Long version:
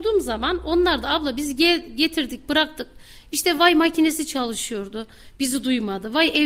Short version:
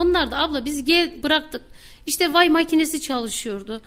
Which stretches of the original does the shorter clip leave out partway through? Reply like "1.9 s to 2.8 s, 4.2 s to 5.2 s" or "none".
1.9 s to 2.5 s